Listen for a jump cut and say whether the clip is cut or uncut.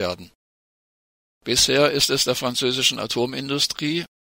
cut